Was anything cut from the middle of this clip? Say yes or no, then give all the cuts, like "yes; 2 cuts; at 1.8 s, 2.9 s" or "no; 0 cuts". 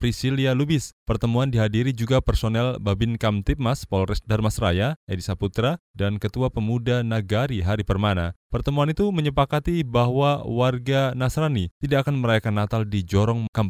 no; 0 cuts